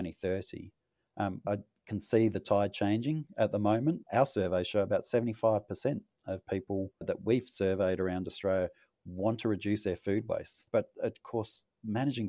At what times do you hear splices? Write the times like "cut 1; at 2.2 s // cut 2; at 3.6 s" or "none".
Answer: cut 1; at 1.4 s // cut 2; at 4.1 s // cut 3; at 10.7 s